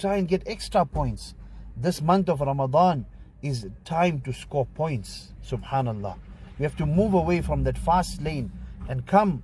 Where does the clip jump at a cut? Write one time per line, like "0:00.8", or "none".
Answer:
none